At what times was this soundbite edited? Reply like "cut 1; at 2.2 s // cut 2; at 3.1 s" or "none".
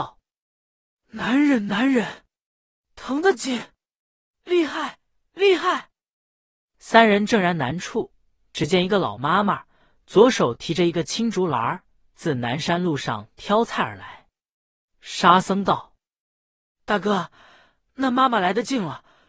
none